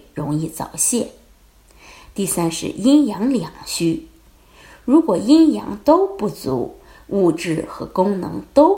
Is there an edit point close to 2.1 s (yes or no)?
no